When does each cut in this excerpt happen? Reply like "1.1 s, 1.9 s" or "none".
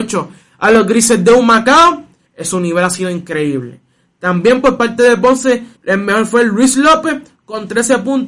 2.3 s, 5.8 s